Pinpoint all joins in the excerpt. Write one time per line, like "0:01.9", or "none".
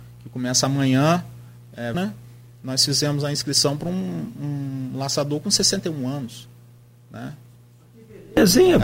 0:01.9